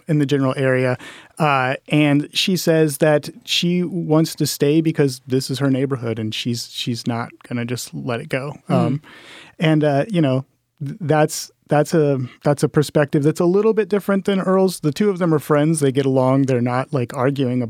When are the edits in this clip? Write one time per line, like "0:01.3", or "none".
0:12.4